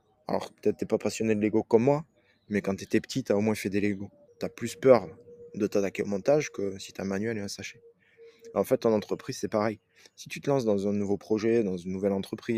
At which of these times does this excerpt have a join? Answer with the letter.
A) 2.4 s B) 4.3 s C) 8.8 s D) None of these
B